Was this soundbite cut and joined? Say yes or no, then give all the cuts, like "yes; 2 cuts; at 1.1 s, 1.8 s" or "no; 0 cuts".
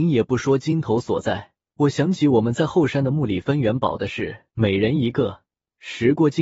yes; 2 cuts; at 1.7 s, 4.5 s